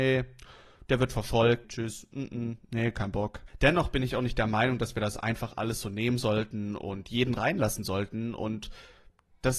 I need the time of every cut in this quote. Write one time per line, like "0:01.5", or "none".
0:01.6